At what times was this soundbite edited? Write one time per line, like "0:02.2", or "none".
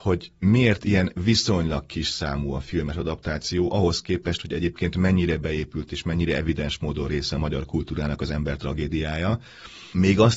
none